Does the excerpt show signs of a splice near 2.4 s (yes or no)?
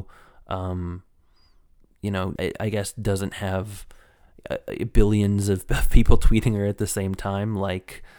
yes